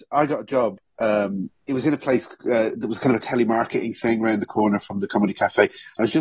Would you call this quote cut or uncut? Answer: uncut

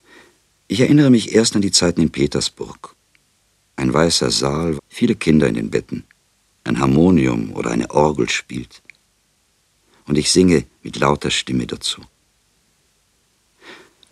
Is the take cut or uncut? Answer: cut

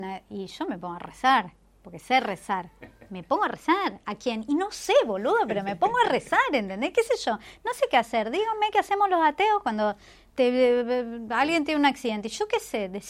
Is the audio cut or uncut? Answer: uncut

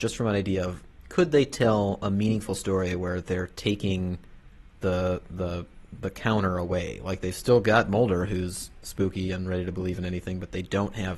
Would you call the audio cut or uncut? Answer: uncut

